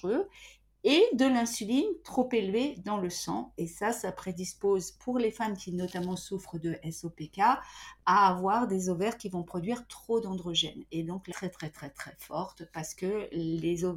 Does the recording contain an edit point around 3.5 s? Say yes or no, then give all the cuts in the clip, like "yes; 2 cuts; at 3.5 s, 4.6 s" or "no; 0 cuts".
no; 1 cut; at 11.3 s